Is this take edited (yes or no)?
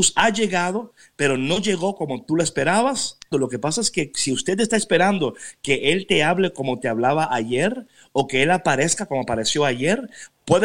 yes